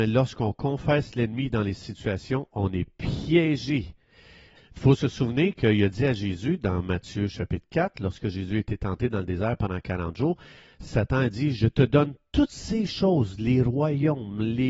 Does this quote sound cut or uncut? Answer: cut